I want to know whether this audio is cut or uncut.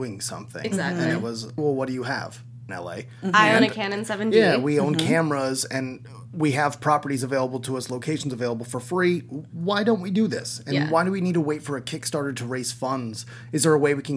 cut